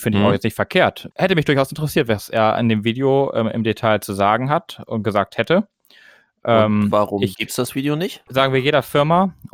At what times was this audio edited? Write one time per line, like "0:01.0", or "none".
0:01.1
0:08.3